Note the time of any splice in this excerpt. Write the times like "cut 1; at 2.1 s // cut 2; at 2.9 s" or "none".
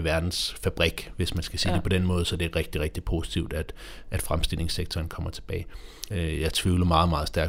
cut 1; at 6.1 s